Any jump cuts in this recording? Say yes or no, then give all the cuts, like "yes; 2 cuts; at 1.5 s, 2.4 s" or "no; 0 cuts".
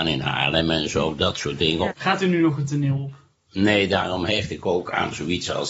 yes; 1 cut; at 1.9 s